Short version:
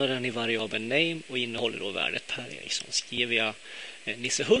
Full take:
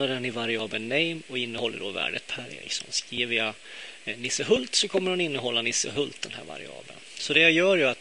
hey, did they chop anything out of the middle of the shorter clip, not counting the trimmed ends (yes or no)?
no